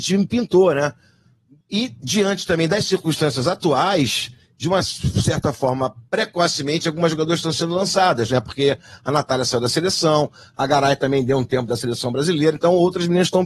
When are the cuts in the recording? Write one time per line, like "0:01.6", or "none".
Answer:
0:01.6